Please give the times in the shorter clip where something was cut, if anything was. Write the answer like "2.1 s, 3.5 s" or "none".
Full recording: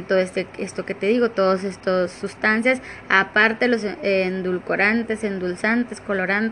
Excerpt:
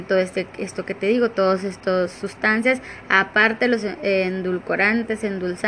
none